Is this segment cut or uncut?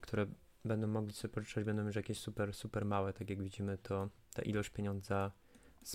uncut